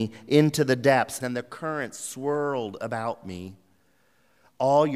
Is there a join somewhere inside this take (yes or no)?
yes